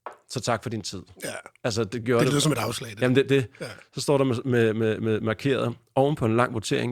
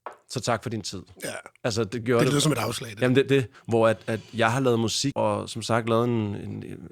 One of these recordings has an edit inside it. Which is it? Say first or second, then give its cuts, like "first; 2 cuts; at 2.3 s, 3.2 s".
second; 2 cuts; at 3.5 s, 5.1 s